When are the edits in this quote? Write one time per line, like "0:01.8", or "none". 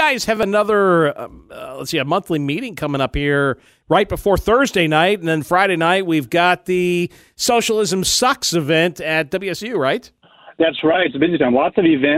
none